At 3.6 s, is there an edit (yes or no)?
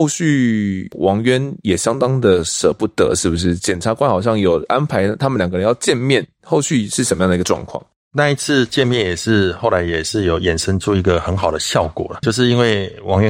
no